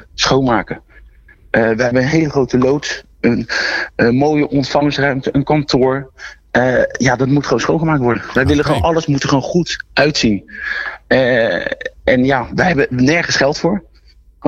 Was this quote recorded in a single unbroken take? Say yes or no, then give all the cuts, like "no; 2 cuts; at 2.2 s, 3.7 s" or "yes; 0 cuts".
yes; 0 cuts